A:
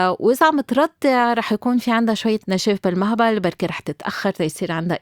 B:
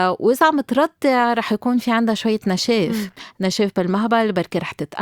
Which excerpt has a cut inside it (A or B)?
A